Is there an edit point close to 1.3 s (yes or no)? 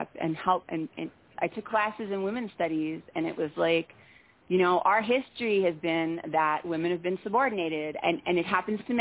yes